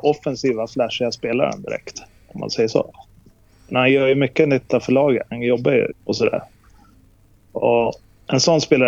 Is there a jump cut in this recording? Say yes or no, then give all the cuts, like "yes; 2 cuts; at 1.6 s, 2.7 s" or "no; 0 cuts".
yes; 1 cut; at 5.9 s